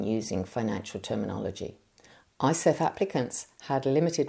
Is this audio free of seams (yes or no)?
no